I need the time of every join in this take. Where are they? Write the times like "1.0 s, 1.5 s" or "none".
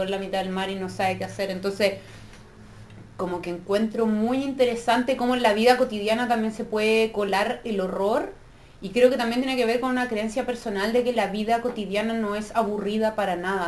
none